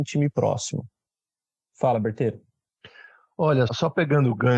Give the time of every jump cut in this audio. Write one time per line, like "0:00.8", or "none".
0:03.7